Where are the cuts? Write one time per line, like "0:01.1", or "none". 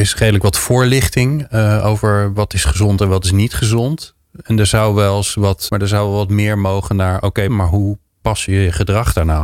0:05.7
0:07.5